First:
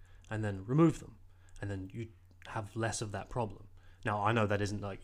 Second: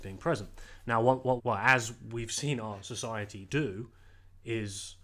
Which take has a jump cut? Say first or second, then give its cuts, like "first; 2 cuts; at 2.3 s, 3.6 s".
second; 2 cuts; at 1.4 s, 3.5 s